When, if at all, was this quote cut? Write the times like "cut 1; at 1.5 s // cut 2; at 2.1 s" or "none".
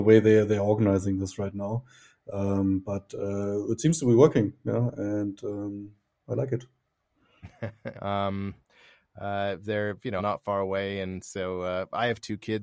cut 1; at 7.9 s // cut 2; at 10.2 s